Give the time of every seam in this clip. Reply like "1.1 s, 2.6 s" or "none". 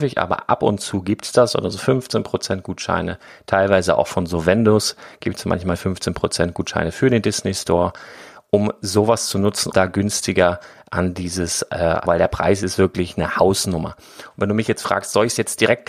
9.7 s, 12.1 s